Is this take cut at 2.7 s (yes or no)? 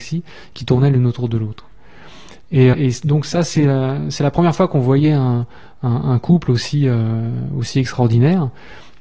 yes